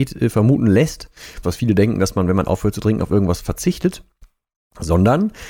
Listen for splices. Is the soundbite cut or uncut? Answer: cut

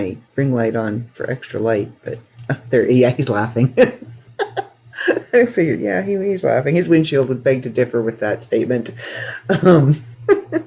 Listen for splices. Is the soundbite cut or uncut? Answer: uncut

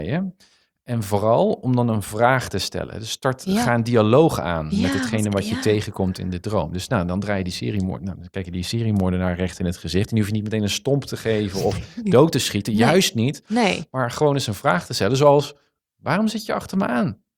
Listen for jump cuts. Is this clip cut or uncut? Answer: uncut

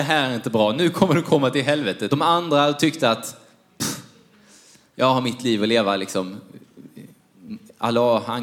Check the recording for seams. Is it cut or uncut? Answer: cut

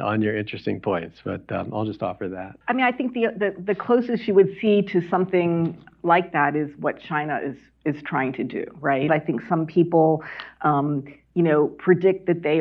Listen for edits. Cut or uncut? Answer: cut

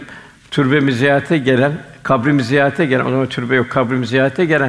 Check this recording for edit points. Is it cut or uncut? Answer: uncut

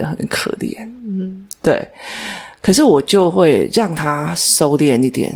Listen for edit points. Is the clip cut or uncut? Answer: uncut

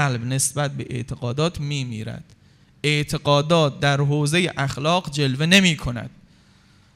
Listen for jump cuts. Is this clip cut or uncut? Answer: uncut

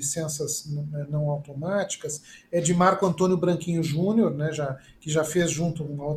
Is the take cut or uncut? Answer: uncut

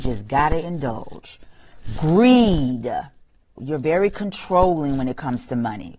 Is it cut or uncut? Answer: cut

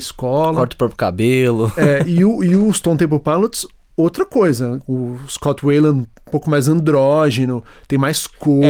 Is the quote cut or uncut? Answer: uncut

